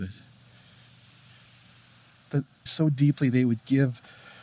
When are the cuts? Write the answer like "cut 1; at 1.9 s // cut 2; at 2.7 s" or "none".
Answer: cut 1; at 2.7 s